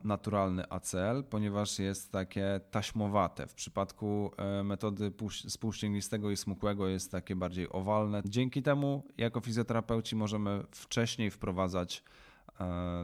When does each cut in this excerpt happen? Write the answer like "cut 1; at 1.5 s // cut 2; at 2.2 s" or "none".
cut 1; at 8.2 s